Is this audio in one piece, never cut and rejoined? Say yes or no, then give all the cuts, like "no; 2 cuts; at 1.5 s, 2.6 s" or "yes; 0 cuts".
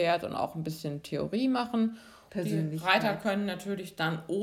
no; 1 cut; at 2.3 s